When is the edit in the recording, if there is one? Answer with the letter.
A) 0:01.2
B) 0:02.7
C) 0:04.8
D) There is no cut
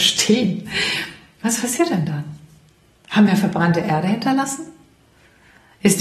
D